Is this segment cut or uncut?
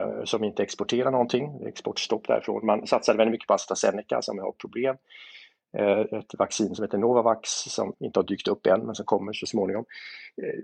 cut